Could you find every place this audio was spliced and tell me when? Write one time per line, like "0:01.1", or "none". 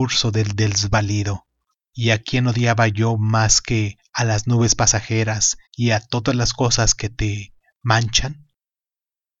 0:01.7
0:05.7

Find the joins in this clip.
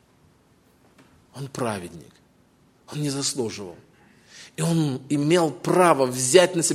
none

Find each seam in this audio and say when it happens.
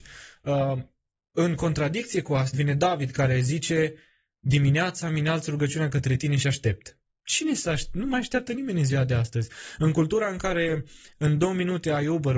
0:02.5

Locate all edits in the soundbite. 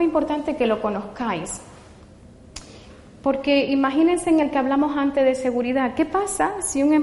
none

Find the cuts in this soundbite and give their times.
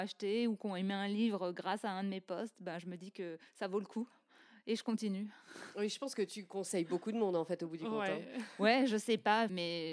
0:03.5

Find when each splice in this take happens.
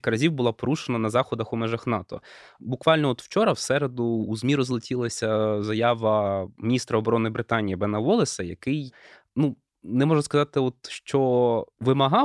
none

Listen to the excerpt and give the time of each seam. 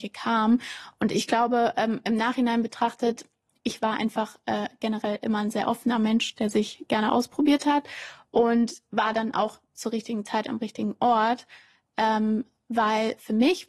none

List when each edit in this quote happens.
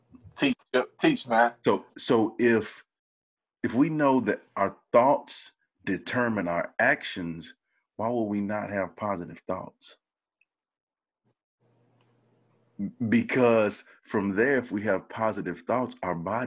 0:01.9

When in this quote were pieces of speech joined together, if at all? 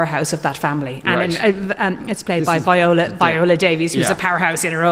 none

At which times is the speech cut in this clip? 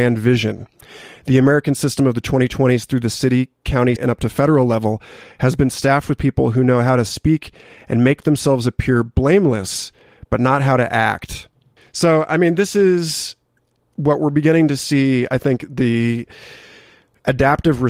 0:04.0
0:11.8

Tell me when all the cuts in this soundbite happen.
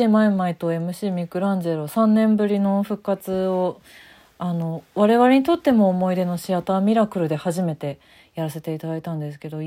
none

